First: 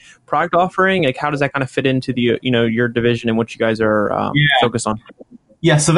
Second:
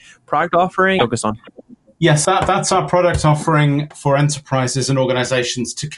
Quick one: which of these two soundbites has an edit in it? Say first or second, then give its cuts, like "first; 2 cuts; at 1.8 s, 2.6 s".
second; 3 cuts; at 1.0 s, 2.2 s, 3.9 s